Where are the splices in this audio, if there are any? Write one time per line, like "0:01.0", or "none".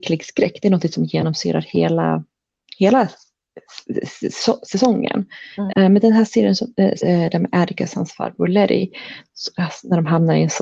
0:05.7
0:07.0